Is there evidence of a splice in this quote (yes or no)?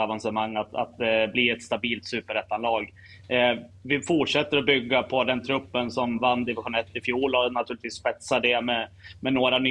no